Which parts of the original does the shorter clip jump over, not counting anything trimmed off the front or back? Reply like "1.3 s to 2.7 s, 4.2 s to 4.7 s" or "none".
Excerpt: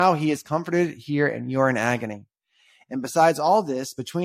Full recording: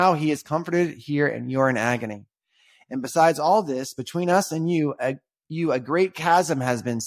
none